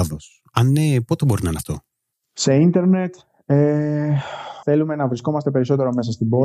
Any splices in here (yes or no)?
yes